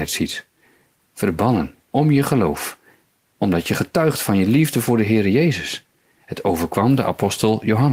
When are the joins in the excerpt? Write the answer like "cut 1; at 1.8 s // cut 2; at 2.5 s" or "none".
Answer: cut 1; at 1.0 s